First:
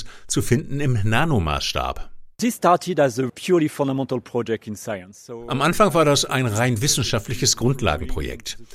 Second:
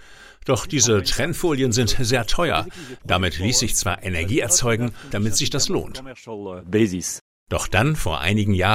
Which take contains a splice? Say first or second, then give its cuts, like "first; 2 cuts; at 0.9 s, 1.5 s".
second; 1 cut; at 5.1 s